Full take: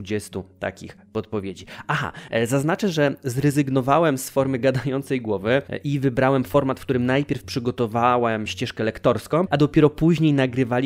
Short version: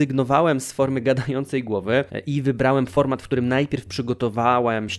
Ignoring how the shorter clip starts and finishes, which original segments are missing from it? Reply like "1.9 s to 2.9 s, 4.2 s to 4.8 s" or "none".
none